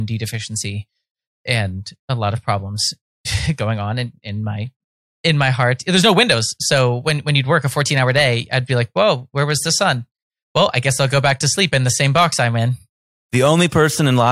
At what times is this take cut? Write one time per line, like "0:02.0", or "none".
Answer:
none